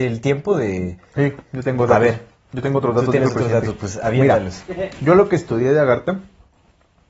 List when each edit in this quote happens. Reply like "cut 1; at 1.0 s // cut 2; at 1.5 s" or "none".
none